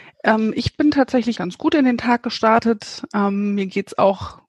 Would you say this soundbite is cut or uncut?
cut